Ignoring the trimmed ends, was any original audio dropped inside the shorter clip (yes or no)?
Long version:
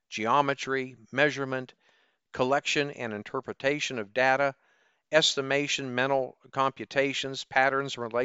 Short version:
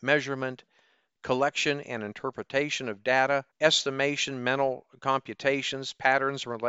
yes